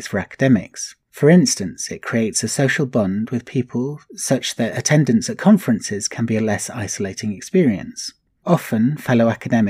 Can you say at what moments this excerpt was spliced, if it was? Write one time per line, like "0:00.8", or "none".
none